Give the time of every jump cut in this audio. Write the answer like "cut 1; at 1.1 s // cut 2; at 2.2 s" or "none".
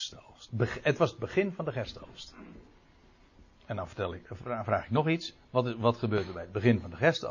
none